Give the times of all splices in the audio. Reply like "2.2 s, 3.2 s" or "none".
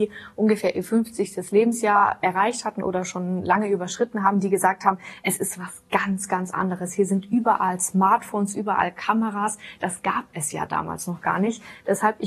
none